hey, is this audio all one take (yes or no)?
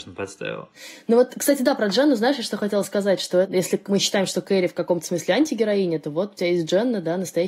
yes